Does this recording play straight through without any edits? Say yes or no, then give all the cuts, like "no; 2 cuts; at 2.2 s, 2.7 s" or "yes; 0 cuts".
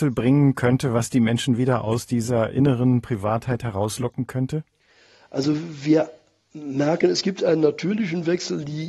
yes; 0 cuts